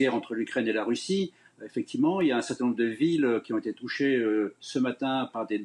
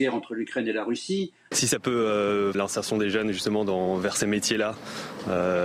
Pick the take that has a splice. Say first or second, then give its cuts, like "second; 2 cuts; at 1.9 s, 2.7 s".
second; 2 cuts; at 1.5 s, 2.5 s